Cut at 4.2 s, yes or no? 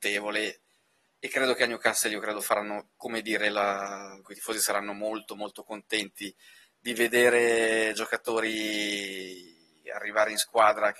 yes